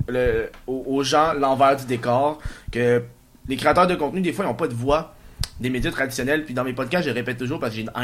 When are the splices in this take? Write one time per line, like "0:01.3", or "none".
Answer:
none